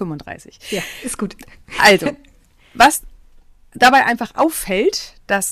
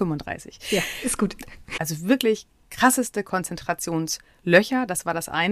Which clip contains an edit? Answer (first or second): second